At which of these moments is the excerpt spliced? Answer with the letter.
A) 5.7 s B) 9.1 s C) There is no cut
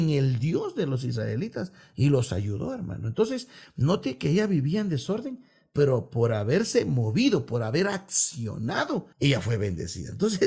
B